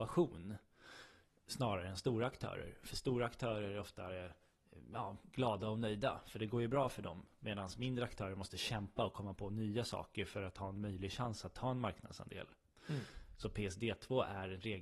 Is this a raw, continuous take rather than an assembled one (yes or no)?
yes